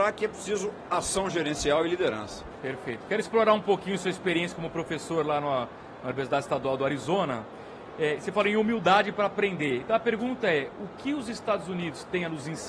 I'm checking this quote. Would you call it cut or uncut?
uncut